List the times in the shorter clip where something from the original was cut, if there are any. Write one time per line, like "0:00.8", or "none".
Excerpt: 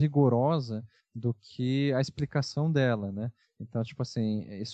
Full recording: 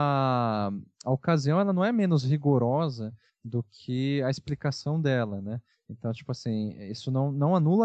none

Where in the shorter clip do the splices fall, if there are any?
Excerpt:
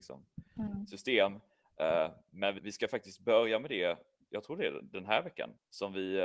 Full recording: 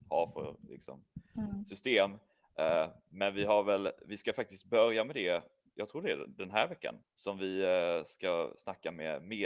0:02.6

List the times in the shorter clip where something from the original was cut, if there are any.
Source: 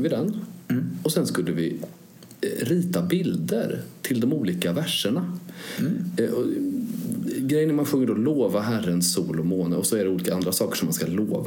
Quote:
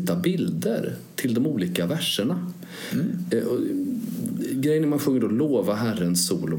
none

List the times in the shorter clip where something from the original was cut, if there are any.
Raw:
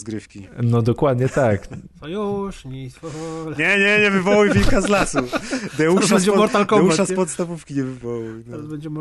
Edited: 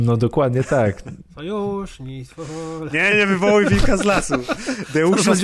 0:03.1

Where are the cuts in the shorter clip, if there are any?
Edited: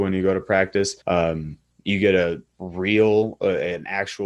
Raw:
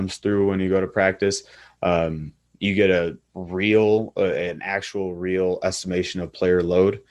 0:01.0

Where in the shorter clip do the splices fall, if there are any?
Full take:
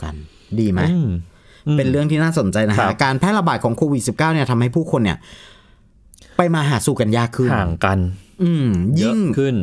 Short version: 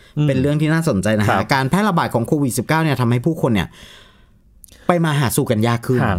none

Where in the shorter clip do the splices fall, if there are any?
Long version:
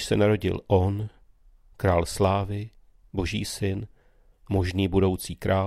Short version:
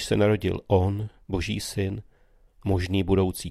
0:01.2

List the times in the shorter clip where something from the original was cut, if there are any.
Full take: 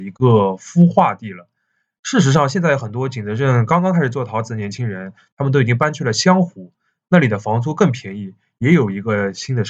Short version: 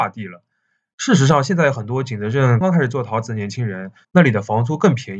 0:02.6
0:04.0

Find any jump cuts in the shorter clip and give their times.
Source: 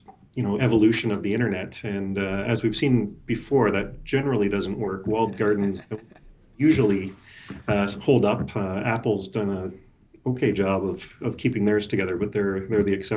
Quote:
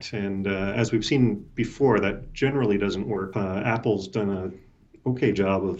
0:03.3

